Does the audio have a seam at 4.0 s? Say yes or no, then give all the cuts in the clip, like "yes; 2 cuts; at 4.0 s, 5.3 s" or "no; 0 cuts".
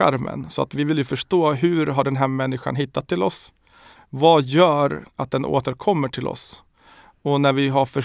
yes; 1 cut; at 4.0 s